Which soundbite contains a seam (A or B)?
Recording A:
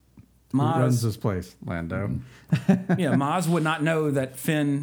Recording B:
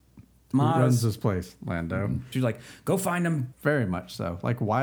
B